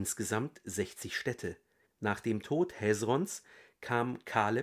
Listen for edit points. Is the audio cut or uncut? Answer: cut